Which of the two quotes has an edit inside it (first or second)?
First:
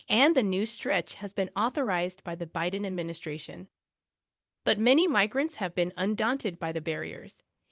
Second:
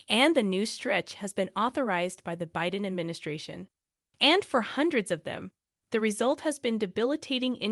second